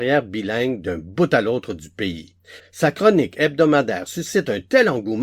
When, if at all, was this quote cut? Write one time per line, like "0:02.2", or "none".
0:02.6